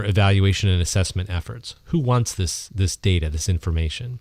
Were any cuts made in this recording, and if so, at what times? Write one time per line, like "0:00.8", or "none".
none